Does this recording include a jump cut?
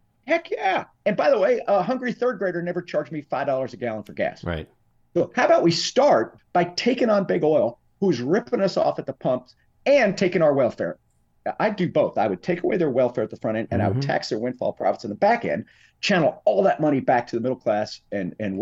yes; 1 cut; at 6.4 s

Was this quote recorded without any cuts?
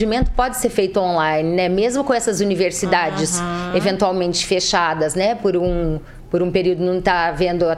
yes; 0 cuts

